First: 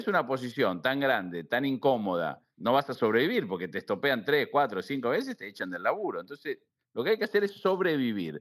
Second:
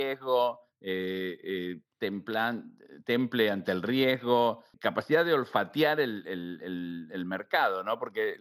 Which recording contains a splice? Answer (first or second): first